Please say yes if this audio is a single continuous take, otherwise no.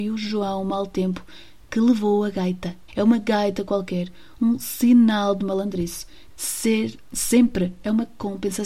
no